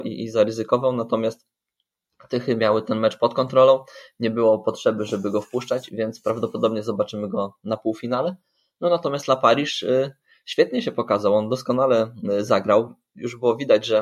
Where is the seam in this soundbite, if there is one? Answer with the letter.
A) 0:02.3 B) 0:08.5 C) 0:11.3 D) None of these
D